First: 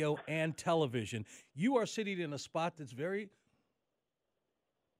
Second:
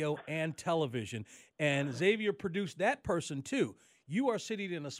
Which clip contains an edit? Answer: first; 1 cut; at 1.4 s

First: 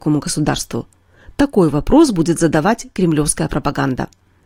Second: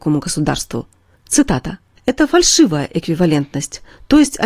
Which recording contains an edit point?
second; 1 cut; at 1.1 s

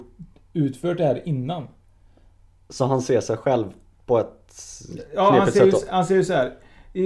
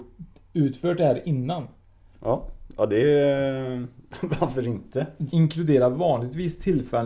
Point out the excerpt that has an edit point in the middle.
second; 2 cuts; at 2.1 s, 5.3 s

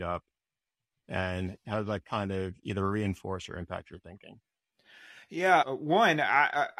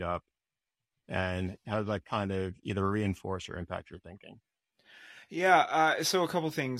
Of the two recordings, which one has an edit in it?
first; 1 cut; at 5.6 s

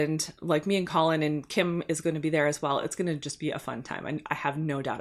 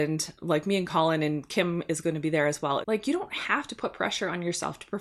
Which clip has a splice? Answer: second; 1 cut; at 2.8 s

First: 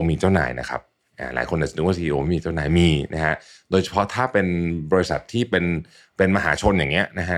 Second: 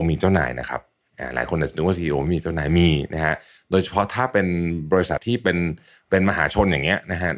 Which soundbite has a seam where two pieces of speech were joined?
second; 1 cut; at 5.2 s

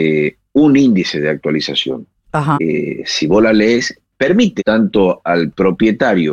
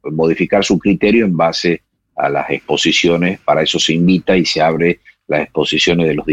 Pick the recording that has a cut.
first; 2 cuts; at 2.5 s, 4.6 s

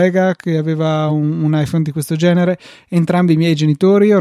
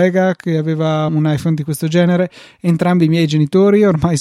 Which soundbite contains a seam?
second; 1 cut; at 1.1 s

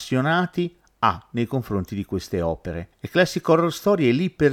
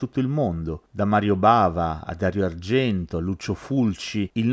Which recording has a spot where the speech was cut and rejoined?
first; 1 cut; at 2.9 s

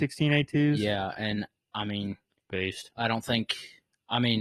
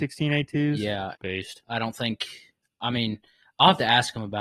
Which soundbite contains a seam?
second; 1 cut; at 1.1 s

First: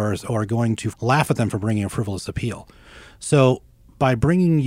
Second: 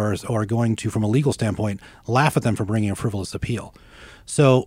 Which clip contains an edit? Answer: first; 1 cut; at 0.9 s

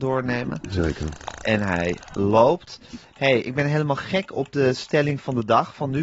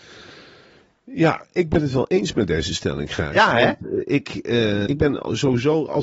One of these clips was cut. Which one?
second; 1 cut; at 4.9 s

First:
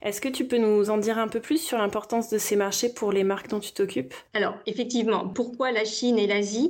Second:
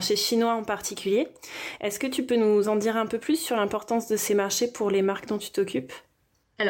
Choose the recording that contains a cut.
first; 1 cut; at 4.3 s

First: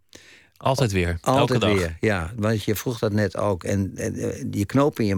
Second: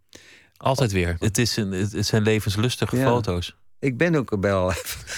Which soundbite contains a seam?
second; 1 cut; at 1.2 s

